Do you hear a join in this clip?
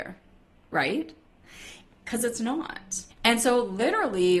yes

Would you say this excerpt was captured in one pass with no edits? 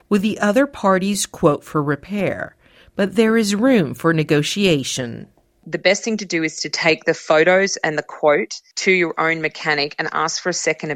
yes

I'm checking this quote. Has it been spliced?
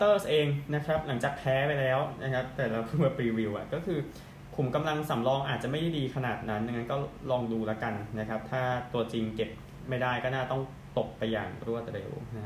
no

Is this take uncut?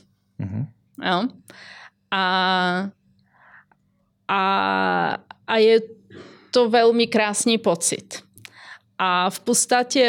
yes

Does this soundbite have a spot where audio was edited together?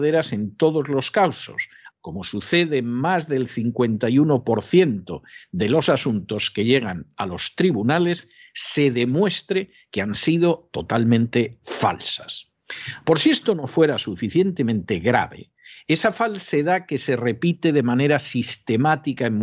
yes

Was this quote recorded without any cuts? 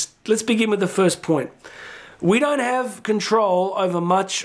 yes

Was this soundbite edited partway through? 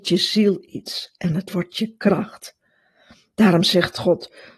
no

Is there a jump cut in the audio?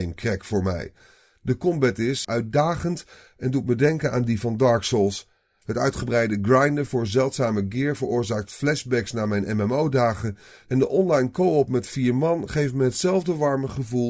yes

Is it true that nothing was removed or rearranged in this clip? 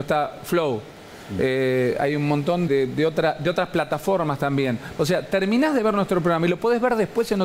no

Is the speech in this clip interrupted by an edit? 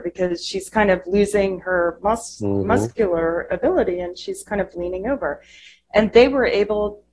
no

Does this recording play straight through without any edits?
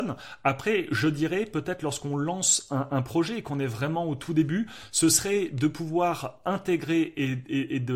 yes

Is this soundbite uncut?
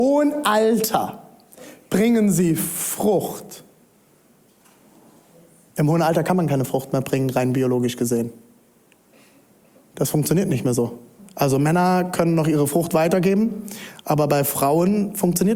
yes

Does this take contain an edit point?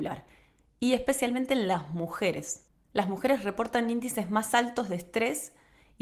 no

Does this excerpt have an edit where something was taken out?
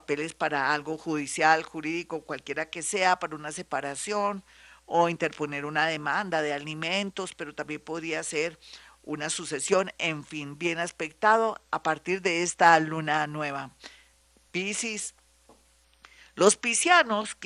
no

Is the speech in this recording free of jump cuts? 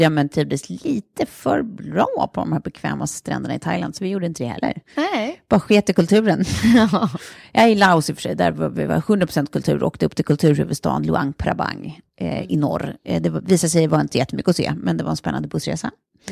yes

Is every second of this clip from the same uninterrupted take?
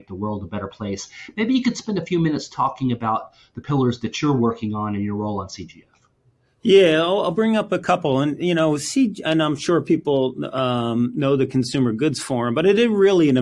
yes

